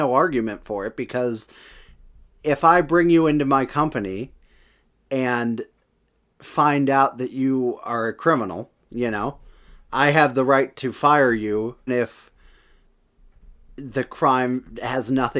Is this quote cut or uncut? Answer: cut